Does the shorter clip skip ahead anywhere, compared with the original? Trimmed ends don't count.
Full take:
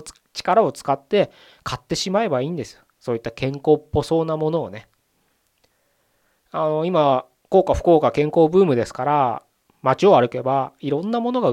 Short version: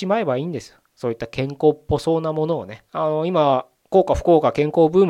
yes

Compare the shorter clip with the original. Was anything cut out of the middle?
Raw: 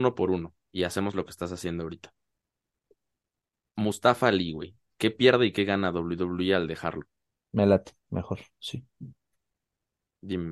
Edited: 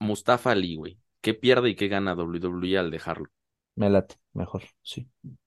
no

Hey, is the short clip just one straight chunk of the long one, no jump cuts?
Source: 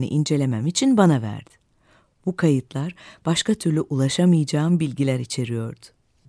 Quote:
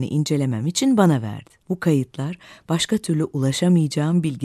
no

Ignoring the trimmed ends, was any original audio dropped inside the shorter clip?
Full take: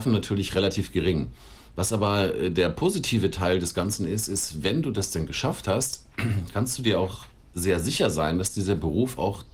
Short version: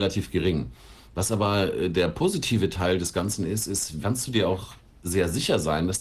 yes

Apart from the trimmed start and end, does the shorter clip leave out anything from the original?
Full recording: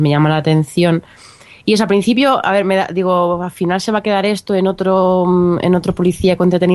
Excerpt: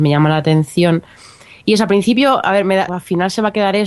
yes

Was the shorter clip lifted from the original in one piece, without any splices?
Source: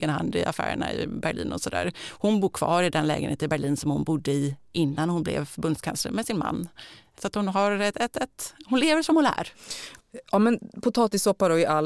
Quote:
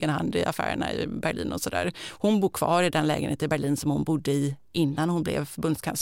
yes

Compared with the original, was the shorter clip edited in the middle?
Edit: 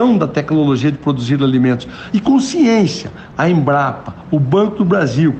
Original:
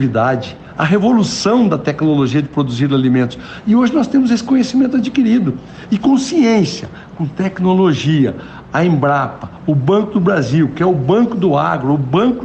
yes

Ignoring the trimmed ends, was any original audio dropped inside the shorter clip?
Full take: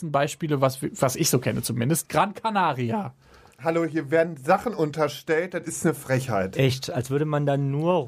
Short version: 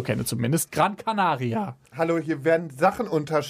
yes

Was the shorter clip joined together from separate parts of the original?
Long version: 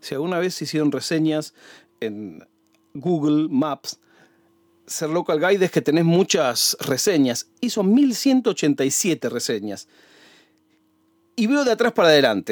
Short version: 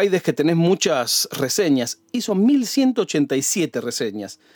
no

